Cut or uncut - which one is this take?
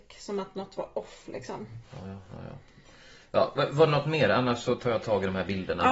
uncut